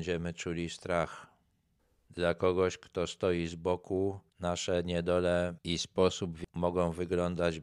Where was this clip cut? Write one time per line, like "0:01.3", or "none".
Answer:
0:02.1
0:06.5